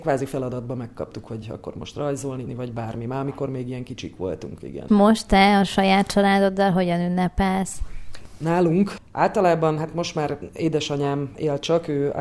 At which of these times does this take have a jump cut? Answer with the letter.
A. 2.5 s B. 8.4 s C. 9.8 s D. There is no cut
A